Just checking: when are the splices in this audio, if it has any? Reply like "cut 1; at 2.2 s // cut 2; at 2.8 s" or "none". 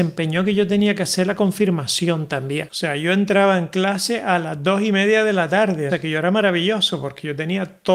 cut 1; at 2.7 s // cut 2; at 5.9 s